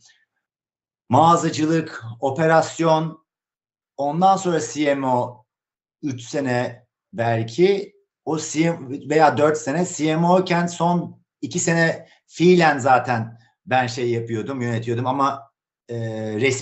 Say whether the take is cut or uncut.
cut